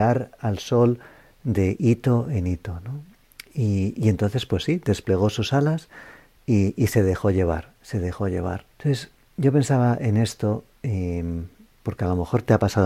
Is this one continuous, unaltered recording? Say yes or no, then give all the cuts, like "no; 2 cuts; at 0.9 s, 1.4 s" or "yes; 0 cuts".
no; 1 cut; at 8.7 s